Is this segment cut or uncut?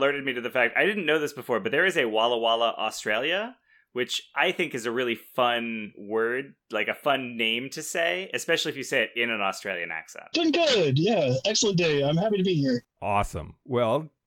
cut